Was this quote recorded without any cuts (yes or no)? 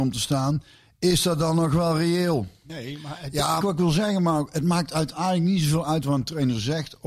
no